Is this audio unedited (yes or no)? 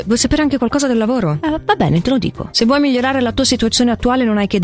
yes